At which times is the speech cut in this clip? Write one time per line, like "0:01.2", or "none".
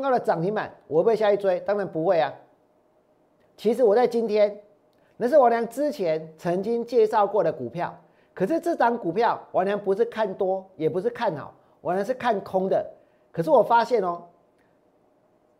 0:03.4
0:05.0